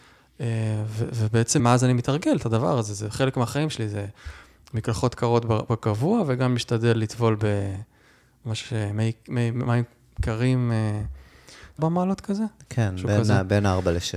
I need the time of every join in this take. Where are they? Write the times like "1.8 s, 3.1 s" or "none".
1.6 s, 11.8 s